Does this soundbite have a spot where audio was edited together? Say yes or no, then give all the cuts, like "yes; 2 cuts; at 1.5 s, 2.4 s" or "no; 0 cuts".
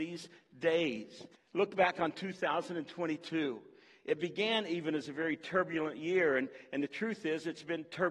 yes; 1 cut; at 1.3 s